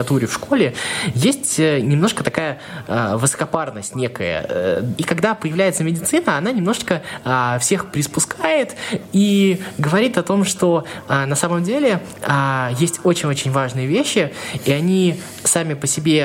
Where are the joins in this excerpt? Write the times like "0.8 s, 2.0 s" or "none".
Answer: 5.0 s